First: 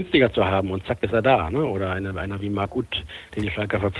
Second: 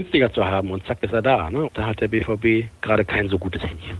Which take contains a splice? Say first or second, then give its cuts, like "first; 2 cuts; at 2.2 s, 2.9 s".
second; 2 cuts; at 1.7 s, 2.8 s